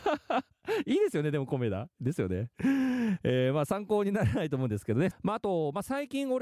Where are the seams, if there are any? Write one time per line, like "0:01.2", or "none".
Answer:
0:05.1